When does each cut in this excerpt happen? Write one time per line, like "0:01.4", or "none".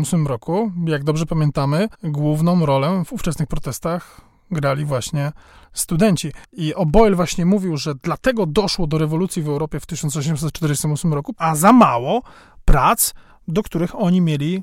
0:01.9
0:06.4
0:11.3